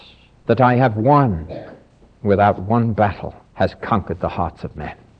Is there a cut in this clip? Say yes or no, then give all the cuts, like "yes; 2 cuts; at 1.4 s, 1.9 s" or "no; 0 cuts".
yes; 2 cuts; at 2.1 s, 3.5 s